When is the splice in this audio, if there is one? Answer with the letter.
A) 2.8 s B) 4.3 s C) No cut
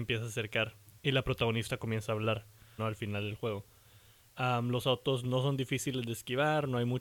A